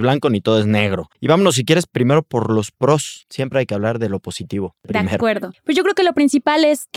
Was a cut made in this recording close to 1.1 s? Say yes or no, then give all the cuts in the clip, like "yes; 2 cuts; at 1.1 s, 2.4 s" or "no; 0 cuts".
yes; 1 cut; at 1.1 s